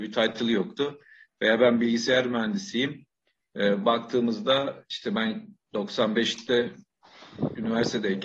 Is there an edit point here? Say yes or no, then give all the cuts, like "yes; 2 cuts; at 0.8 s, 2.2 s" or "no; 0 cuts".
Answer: no; 0 cuts